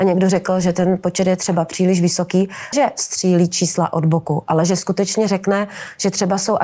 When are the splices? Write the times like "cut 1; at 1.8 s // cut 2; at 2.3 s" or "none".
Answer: cut 1; at 2.7 s